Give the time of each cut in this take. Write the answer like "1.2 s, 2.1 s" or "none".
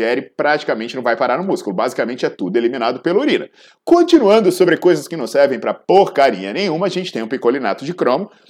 none